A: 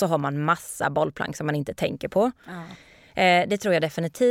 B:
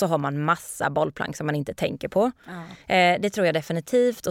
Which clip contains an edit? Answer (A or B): B